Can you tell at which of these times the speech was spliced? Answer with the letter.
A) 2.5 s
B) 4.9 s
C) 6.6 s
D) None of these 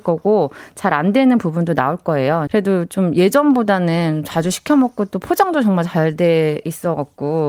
A